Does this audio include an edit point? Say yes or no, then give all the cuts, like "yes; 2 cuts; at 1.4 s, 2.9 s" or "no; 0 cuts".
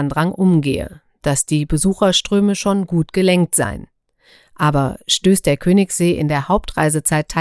no; 0 cuts